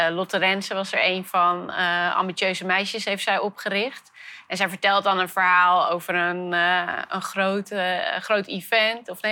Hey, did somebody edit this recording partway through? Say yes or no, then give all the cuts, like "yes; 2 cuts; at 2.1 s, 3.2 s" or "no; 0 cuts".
no; 0 cuts